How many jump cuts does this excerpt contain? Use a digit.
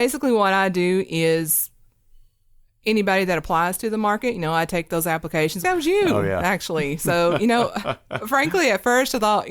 1